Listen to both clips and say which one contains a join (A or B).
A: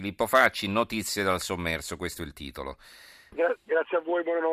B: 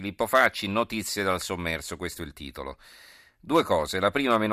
A